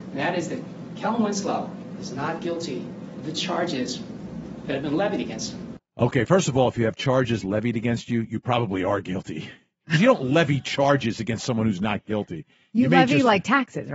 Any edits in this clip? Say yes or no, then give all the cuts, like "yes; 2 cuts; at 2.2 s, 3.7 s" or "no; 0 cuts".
no; 0 cuts